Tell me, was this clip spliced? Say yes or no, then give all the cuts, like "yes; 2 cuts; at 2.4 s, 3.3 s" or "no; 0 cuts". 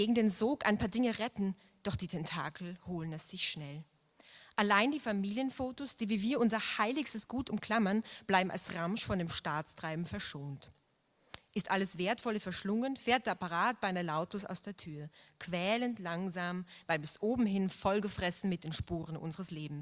no; 0 cuts